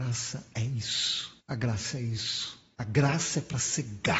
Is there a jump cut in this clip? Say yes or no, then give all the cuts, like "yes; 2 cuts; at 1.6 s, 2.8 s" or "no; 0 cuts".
yes; 2 cuts; at 1.4 s, 2.7 s